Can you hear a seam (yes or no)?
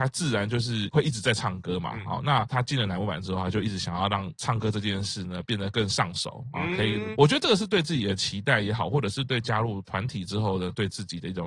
no